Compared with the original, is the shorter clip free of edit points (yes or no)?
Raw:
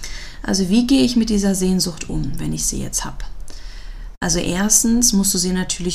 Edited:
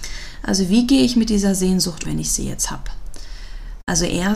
no